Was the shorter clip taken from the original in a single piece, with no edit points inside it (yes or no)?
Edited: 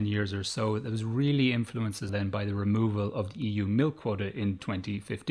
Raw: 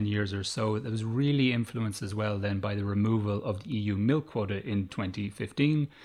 no